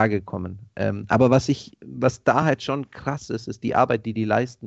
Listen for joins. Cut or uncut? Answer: uncut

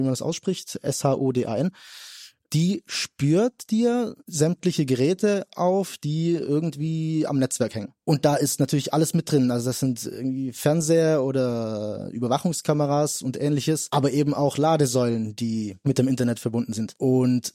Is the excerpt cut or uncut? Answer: uncut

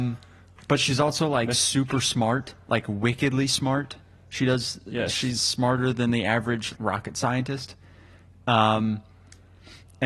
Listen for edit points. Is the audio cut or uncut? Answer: cut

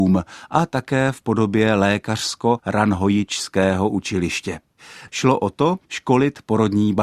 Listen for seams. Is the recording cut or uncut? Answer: cut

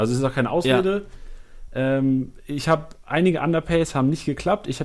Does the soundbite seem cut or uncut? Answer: uncut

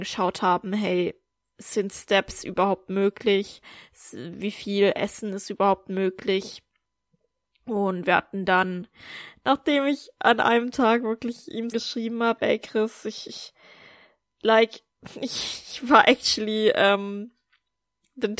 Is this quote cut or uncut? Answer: cut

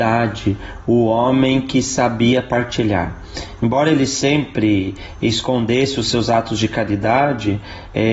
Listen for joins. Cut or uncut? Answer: uncut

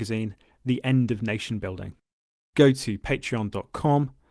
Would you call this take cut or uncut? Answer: cut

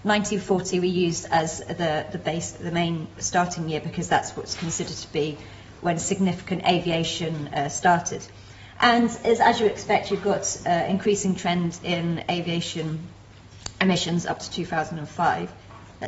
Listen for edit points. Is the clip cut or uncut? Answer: uncut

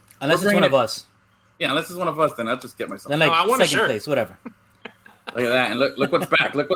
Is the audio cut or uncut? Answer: uncut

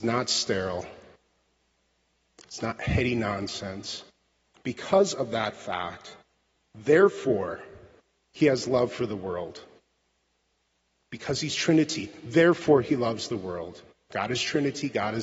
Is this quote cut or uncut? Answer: cut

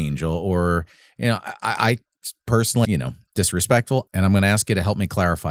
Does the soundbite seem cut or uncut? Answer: cut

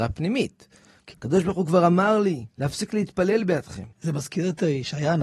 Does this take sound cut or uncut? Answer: cut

